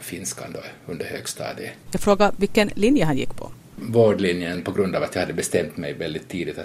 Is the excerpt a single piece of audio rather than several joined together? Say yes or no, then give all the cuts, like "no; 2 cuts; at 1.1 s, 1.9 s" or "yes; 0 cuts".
no; 1 cut; at 1.9 s